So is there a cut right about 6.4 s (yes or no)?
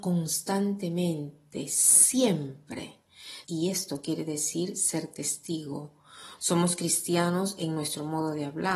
yes